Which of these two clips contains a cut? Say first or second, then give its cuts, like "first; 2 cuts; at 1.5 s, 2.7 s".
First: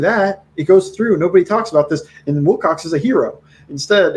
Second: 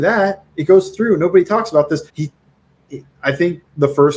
second; 1 cut; at 2.1 s